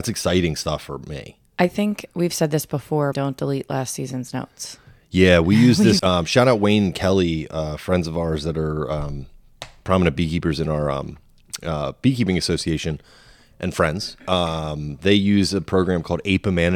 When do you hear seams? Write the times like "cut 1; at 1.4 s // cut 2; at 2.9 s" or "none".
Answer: cut 1; at 3.1 s // cut 2; at 6.0 s